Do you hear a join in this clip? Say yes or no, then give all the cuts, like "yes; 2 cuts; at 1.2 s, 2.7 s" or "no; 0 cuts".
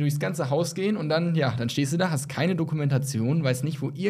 no; 0 cuts